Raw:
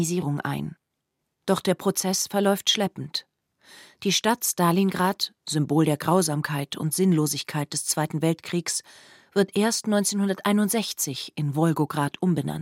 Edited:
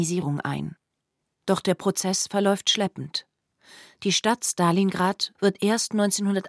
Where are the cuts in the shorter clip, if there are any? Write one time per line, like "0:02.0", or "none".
0:05.4